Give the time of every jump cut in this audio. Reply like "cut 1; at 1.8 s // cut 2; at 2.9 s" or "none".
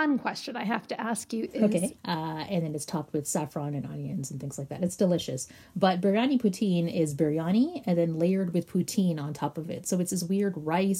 cut 1; at 2.0 s